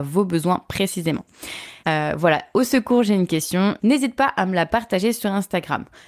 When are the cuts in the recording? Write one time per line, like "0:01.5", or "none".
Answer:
0:01.8
0:03.8

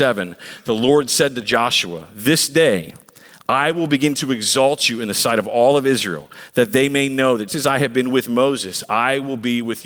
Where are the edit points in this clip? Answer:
0:07.5

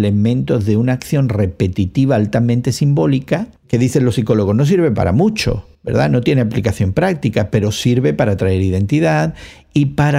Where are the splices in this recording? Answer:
0:03.6
0:05.7

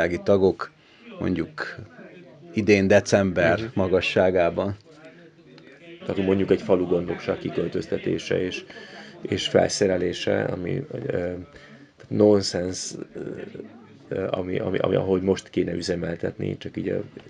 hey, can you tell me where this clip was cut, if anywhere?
0:06.0

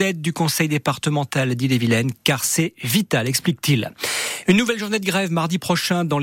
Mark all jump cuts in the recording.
none

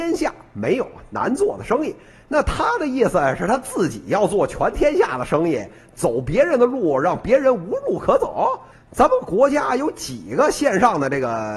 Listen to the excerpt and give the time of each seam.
0:08.7

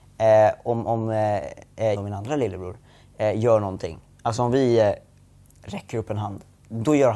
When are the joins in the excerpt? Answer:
0:01.9

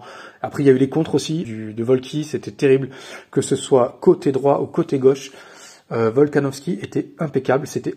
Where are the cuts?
0:01.4

